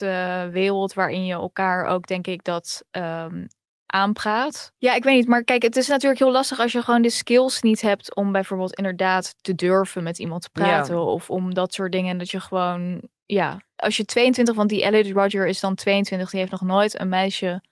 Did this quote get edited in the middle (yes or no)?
yes